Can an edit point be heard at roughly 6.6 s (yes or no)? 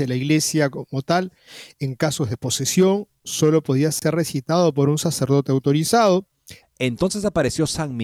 yes